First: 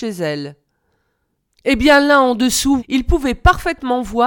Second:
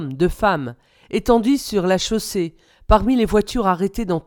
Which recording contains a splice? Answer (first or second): first